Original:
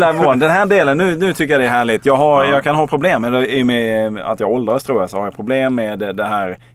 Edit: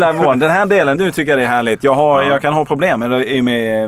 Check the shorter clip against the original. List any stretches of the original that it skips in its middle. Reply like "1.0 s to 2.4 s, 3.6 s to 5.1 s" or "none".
1.0 s to 1.2 s